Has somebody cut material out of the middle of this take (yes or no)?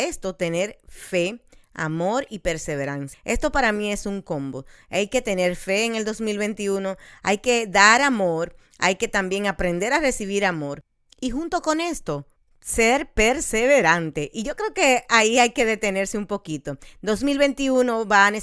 yes